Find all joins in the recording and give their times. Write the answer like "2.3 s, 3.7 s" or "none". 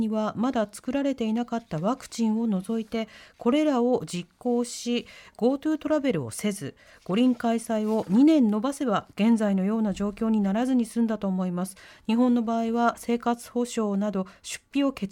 none